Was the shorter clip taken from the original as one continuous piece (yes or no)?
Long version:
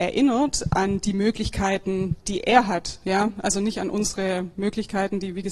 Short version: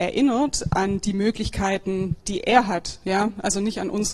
yes